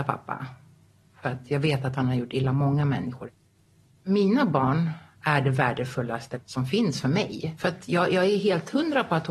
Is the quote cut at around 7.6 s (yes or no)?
yes